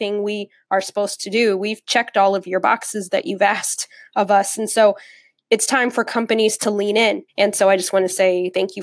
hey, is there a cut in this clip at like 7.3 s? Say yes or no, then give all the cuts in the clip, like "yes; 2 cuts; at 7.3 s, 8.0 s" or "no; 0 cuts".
yes; 1 cut; at 7.3 s